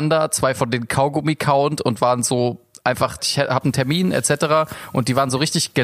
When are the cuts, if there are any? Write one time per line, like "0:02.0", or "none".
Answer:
0:03.2